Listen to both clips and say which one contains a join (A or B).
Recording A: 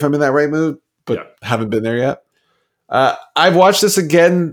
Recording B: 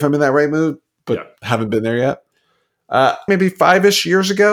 B